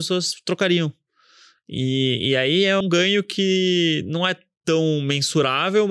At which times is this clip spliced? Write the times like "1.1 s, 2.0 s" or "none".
2.8 s